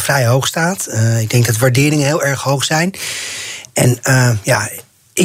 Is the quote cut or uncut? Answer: uncut